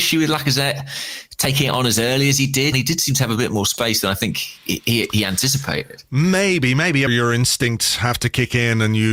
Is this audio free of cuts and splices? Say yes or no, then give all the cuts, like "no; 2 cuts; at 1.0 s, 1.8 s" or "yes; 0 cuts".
no; 2 cuts; at 2.7 s, 7.1 s